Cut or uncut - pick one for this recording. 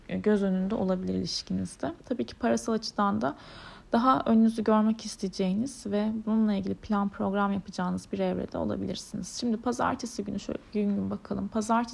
uncut